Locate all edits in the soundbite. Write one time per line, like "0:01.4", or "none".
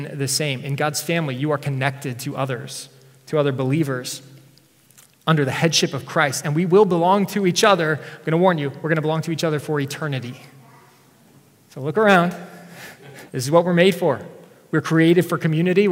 0:13.3